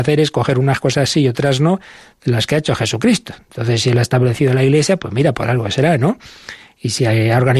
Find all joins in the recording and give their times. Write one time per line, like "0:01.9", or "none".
none